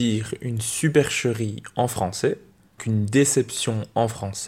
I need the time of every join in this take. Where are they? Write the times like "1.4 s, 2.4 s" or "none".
2.8 s

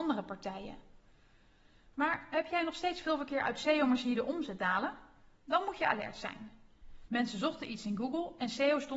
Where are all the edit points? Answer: 7.1 s

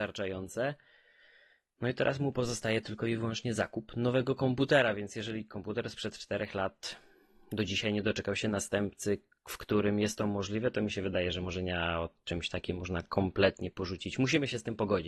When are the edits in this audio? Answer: none

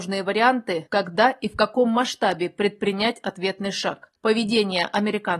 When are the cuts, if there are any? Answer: none

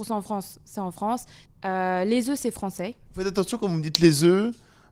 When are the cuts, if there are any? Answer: 1.5 s, 3.1 s

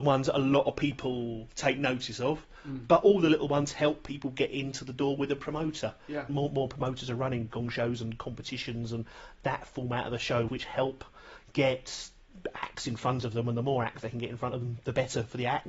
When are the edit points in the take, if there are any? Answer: 6.3 s, 10.5 s

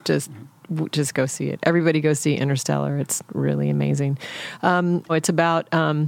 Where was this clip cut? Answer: 5.1 s

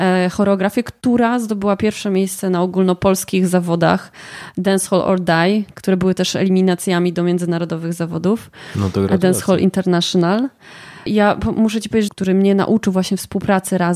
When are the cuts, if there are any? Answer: 11.1 s, 12.1 s

